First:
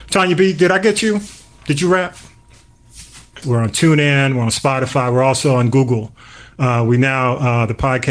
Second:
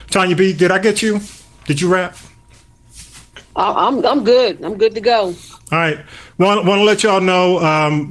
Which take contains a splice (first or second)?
first